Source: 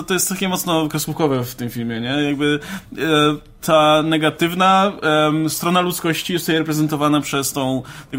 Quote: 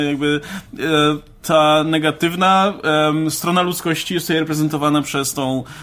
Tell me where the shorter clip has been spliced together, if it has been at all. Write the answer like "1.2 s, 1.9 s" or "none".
none